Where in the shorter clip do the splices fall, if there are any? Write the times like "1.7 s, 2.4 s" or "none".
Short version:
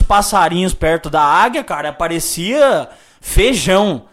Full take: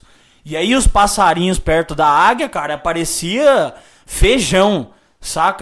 none